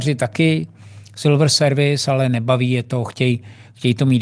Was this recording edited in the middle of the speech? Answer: no; 0 cuts

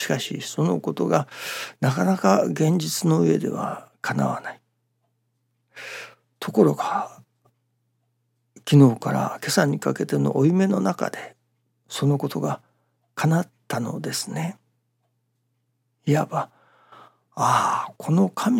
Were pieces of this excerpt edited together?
no; 0 cuts

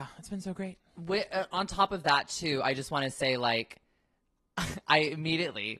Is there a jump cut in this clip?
no; 0 cuts

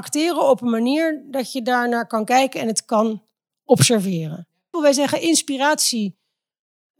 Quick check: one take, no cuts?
no; 1 cut; at 4.7 s

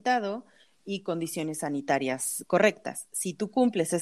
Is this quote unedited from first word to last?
yes; 0 cuts

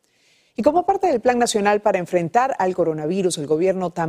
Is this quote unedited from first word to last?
yes; 0 cuts

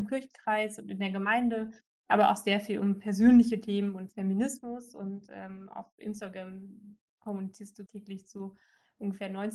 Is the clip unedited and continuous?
no; 2 cuts; at 4.1 s, 7.9 s

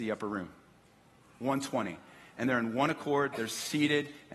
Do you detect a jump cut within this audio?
no; 0 cuts

